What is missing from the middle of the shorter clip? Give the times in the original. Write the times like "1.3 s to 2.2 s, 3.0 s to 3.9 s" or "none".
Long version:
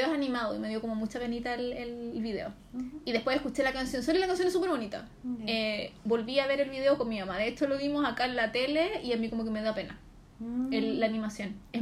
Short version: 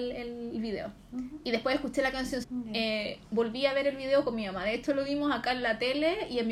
4.0 s to 5.2 s